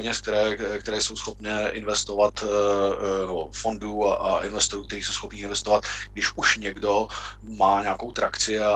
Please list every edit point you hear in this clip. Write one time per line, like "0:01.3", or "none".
none